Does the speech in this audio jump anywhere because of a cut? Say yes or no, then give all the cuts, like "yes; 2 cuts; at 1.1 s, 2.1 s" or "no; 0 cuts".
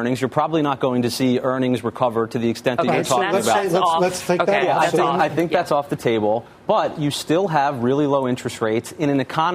no; 0 cuts